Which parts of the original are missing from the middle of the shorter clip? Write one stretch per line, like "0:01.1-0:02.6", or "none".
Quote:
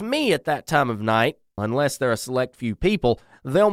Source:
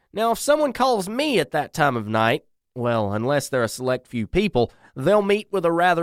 0:02.6-0:03.1